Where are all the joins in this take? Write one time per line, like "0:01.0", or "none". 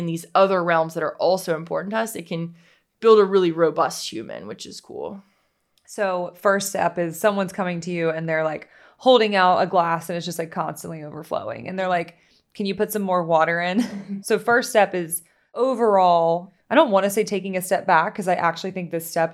0:14.2